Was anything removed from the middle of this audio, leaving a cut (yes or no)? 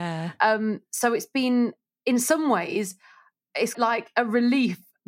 yes